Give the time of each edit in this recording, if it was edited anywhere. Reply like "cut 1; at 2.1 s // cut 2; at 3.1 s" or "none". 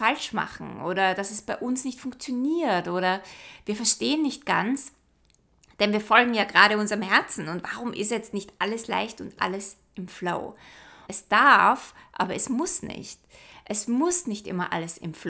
cut 1; at 11.1 s